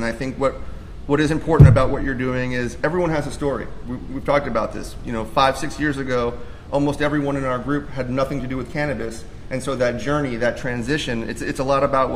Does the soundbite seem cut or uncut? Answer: uncut